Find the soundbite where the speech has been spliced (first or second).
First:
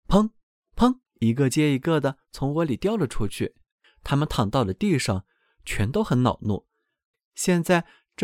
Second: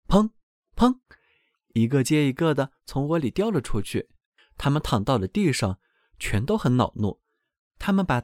first